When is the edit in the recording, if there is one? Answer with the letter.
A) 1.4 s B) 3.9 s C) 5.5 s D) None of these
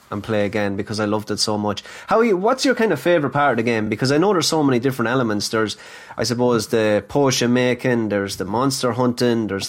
D